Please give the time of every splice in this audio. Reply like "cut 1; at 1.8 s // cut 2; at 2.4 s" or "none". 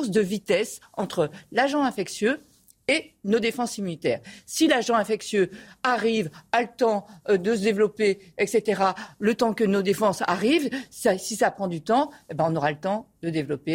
none